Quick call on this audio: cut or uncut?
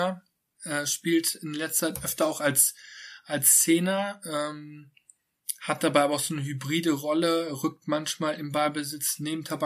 uncut